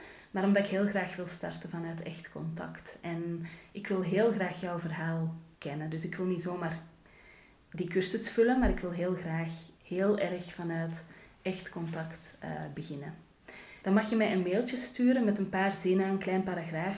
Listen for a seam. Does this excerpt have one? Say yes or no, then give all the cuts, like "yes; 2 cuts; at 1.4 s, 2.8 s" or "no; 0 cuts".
yes; 2 cuts; at 9.7 s, 13.8 s